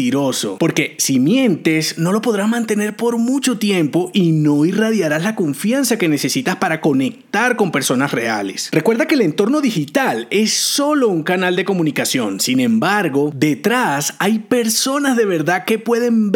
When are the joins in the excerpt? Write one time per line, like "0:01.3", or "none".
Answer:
none

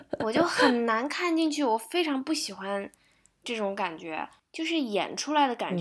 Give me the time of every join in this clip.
0:04.4

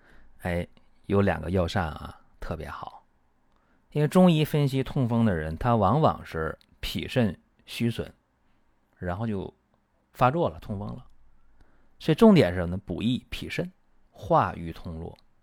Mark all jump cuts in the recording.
0:08.8
0:14.0

